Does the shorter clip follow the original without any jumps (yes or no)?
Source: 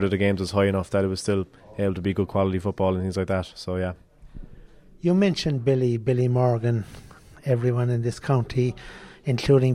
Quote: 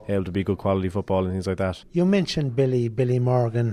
no